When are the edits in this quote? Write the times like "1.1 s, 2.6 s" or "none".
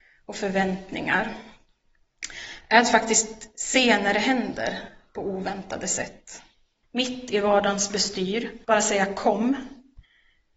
6.8 s, 8.6 s